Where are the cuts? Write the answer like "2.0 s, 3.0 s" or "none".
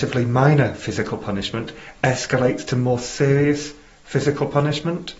none